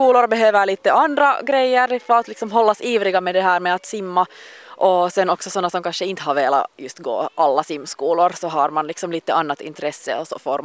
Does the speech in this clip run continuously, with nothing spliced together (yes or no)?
yes